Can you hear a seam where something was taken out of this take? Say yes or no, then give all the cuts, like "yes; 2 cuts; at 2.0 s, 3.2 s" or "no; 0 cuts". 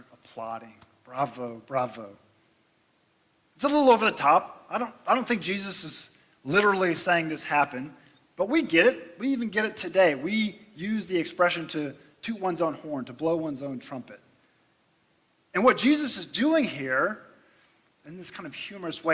no; 0 cuts